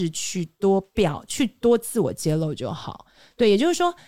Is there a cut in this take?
no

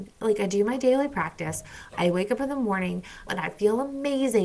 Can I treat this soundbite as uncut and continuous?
no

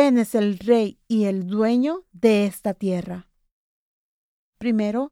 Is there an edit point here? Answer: no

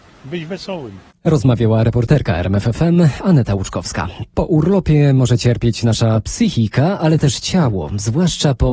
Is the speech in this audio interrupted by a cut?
no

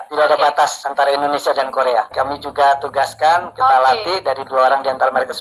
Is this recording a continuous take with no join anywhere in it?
yes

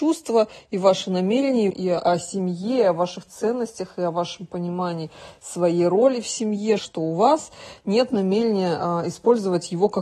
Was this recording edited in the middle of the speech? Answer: yes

